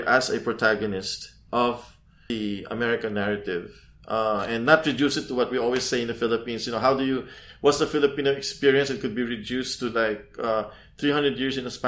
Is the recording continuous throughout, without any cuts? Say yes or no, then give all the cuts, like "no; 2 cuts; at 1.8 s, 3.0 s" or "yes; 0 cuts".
yes; 0 cuts